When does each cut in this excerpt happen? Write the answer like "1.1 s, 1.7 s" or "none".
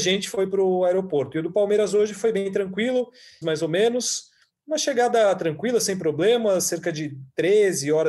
3.4 s